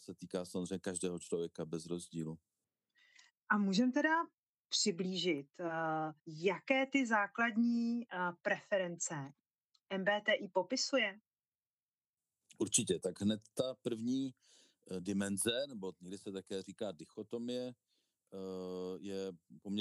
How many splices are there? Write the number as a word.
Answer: one